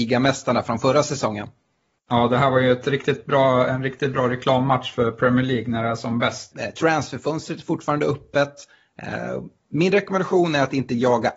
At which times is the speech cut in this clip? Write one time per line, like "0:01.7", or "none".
0:06.5